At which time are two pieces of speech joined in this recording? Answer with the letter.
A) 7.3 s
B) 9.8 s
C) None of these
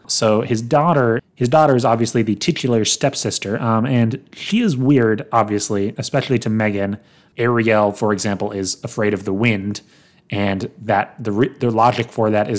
A